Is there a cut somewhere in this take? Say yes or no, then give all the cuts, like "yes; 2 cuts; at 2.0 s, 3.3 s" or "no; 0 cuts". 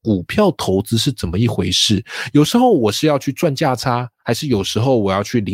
no; 0 cuts